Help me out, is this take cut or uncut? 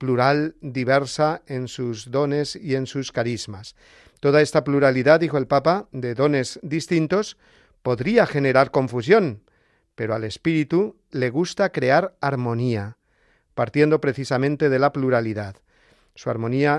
cut